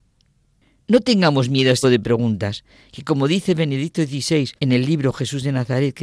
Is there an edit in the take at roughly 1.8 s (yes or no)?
yes